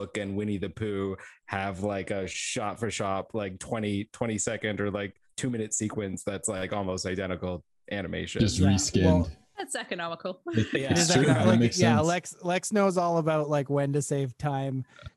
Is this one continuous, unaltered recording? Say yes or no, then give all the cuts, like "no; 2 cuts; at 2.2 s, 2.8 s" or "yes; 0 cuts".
yes; 0 cuts